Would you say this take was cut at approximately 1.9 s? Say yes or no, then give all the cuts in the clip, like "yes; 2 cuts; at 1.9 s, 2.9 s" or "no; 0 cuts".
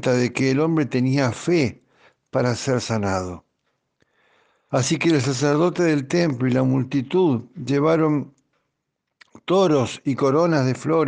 no; 1 cut; at 4.7 s